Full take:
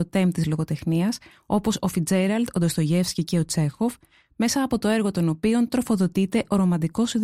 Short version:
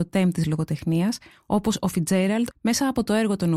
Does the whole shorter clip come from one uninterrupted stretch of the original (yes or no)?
no